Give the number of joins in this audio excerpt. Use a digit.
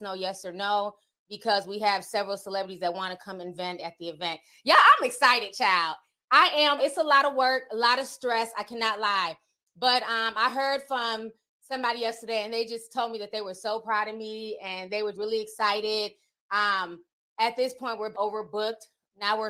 3